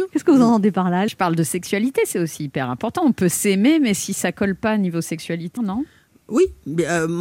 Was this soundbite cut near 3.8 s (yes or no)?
no